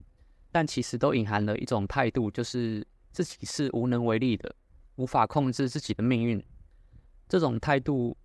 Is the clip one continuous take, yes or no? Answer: yes